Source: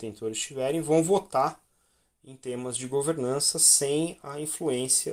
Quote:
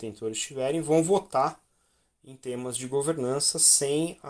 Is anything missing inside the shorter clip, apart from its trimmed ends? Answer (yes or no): no